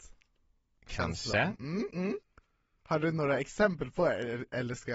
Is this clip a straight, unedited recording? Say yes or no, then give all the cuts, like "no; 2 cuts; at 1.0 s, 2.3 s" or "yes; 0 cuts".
yes; 0 cuts